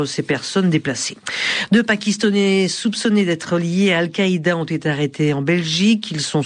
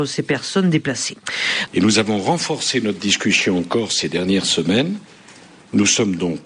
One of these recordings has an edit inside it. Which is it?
second; 1 cut; at 1.7 s

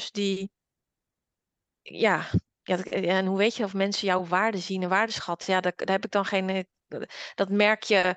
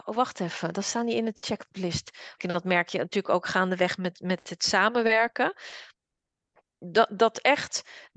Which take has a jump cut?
second; 1 cut; at 2.4 s

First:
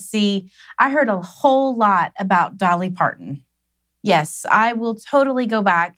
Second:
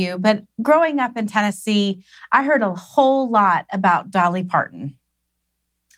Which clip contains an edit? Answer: first; 1 cut; at 3.9 s

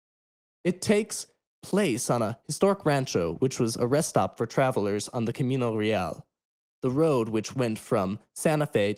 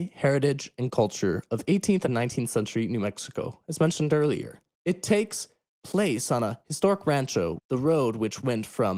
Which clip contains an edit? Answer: second; 2 cuts; at 4.7 s, 7.6 s

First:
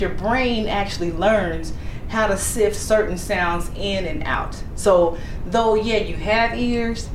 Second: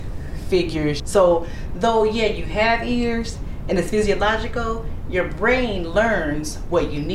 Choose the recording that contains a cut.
second; 1 cut; at 1.0 s

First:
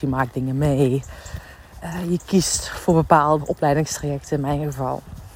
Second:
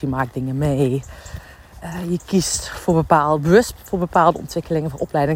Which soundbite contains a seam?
first; 1 cut; at 3.4 s

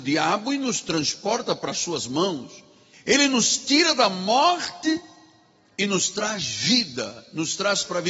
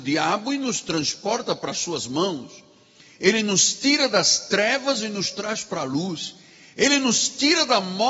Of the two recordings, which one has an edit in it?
first; 1 cut; at 2.9 s

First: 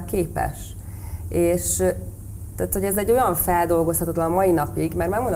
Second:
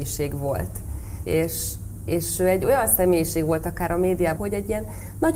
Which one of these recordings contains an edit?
second; 2 cuts; at 1.2 s, 4.4 s

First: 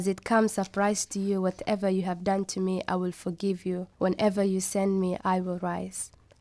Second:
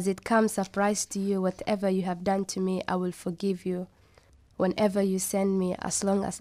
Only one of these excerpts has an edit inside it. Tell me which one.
first; 2 cuts; at 3.9 s, 5.2 s

